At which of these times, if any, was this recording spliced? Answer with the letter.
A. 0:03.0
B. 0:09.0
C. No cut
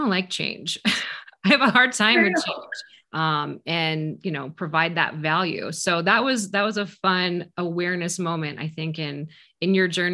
A